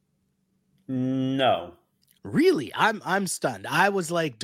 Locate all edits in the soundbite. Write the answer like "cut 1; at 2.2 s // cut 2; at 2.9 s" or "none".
cut 1; at 2.2 s